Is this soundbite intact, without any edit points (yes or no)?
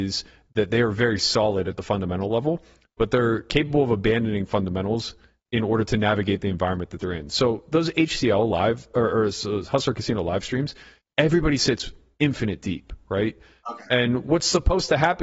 yes